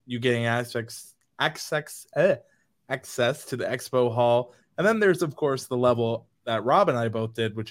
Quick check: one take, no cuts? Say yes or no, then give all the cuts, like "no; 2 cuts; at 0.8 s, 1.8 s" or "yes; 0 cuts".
no; 1 cut; at 4.6 s